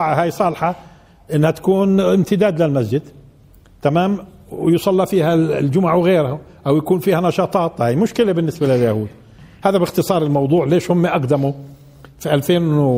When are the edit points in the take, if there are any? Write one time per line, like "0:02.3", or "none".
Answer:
none